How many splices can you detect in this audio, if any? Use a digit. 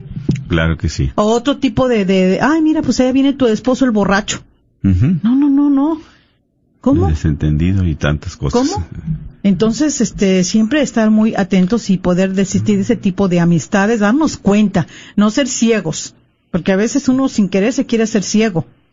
0